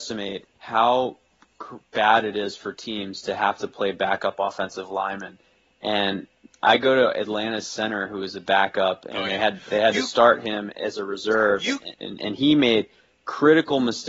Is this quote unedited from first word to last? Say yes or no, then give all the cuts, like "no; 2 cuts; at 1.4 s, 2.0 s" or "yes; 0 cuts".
no; 1 cut; at 11.9 s